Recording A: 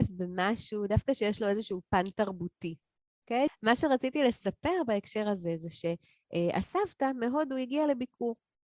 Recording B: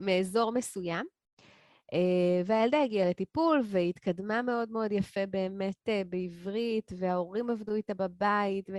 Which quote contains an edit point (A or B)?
A